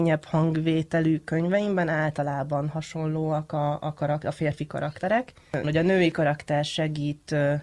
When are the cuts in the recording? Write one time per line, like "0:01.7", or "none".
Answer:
0:05.6